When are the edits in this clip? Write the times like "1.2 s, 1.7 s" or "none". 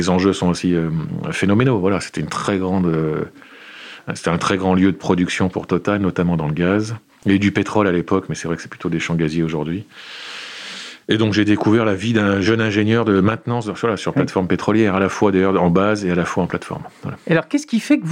11.0 s

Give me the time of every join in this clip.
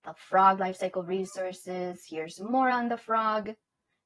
none

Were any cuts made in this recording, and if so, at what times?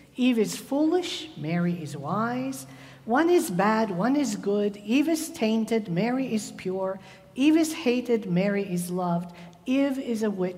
none

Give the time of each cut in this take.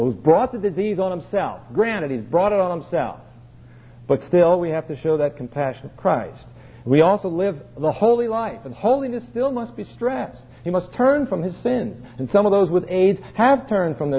none

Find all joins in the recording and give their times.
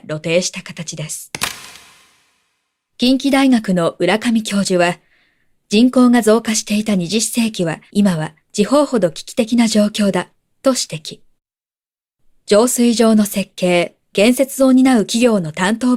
7.9 s

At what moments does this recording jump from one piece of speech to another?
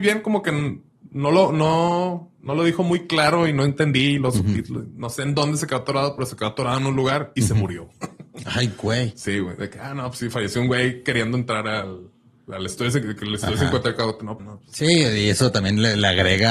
14.4 s

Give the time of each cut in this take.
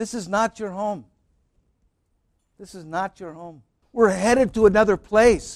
3.8 s

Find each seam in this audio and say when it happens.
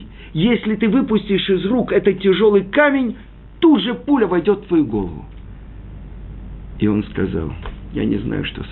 none

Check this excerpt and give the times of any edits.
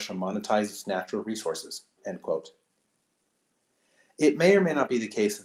none

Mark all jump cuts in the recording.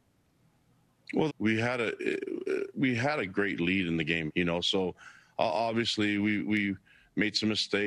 1.3 s, 4.3 s

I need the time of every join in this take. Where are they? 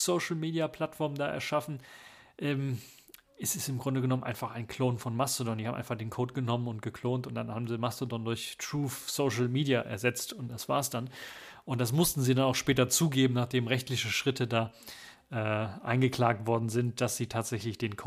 none

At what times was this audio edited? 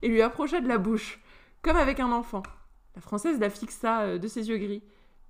none

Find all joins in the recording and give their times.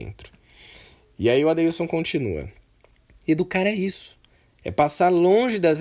none

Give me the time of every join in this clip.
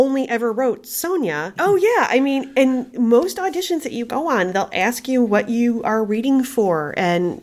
1.6 s

